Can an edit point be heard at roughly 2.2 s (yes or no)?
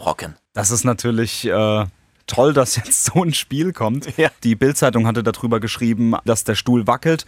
no